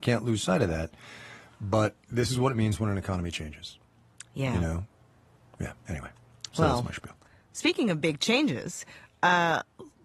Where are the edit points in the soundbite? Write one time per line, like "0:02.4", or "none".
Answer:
none